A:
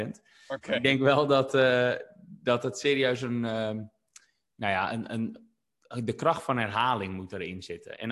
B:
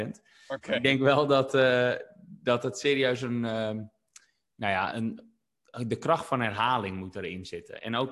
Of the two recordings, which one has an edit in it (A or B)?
B